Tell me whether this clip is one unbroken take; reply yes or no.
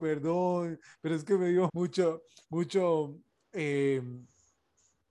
no